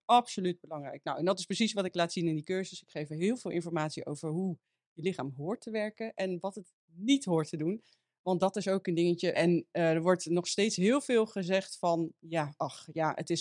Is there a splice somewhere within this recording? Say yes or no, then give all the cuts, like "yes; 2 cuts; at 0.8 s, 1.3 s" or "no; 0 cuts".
yes; 1 cut; at 9.3 s